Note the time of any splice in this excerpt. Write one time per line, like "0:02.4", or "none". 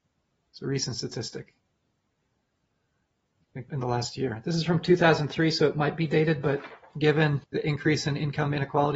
0:03.7
0:07.4